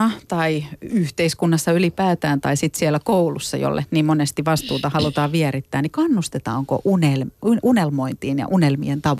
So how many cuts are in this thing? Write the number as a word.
zero